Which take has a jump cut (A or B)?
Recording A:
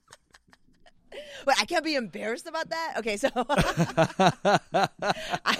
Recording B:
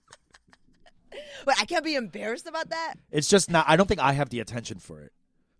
B